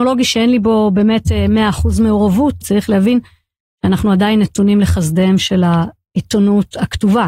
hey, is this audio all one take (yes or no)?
no